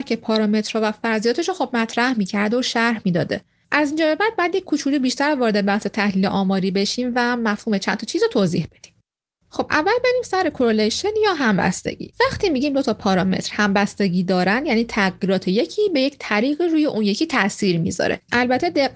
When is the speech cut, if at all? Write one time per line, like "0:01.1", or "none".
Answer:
none